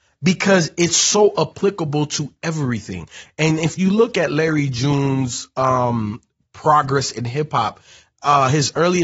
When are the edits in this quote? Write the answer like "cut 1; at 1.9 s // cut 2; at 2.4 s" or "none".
none